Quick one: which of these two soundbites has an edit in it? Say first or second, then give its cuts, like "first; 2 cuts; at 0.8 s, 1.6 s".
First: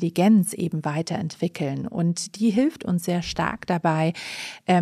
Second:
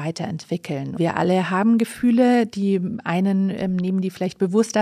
second; 1 cut; at 1.0 s